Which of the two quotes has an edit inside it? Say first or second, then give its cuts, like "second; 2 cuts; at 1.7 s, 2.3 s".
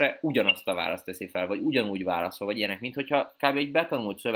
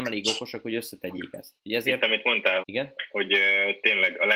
second; 2 cuts; at 1.6 s, 2.6 s